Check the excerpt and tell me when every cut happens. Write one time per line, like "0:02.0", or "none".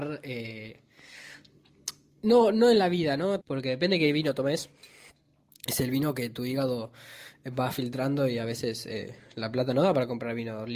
0:03.4